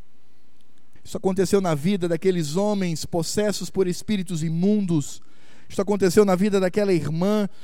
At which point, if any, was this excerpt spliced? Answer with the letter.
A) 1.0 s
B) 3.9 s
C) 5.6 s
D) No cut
A